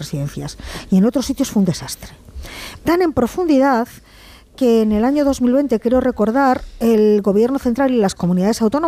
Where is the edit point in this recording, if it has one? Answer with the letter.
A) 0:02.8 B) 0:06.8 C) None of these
A